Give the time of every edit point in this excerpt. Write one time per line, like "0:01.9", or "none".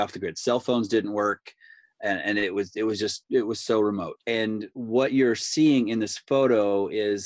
none